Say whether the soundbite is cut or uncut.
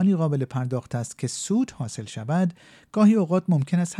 uncut